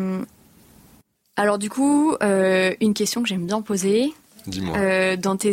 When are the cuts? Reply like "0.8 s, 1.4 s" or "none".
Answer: none